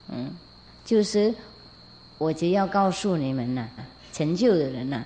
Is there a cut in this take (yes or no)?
yes